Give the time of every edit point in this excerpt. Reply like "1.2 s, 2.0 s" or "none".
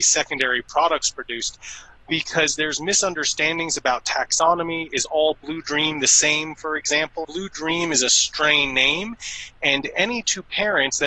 7.2 s

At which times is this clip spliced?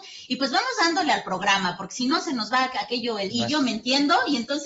3.3 s

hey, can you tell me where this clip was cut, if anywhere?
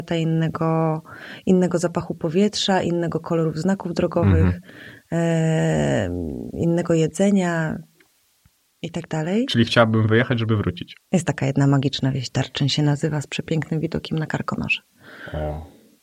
11.0 s

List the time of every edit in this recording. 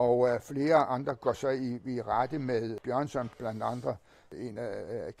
1.2 s

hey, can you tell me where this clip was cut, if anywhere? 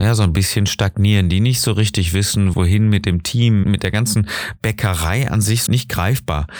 2.5 s, 3.6 s, 5.7 s

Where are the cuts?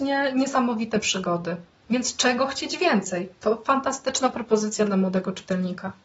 none

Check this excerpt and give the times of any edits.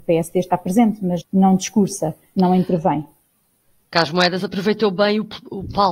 1.2 s

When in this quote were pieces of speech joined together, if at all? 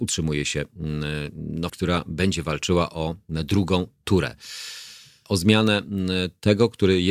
1.7 s, 5.3 s

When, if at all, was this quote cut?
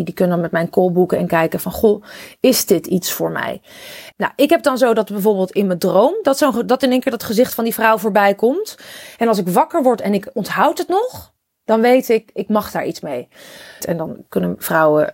4.1 s, 13.8 s

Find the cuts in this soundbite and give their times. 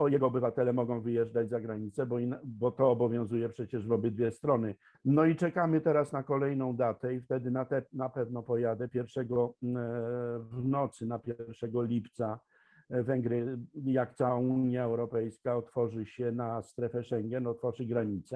4.9 s

